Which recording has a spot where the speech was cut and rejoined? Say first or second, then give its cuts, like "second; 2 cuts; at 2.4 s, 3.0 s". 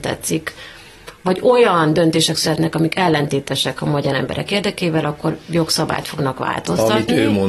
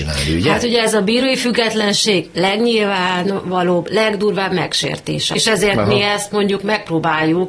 second; 1 cut; at 5.4 s